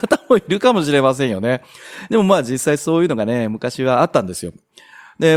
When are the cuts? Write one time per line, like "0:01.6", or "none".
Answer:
none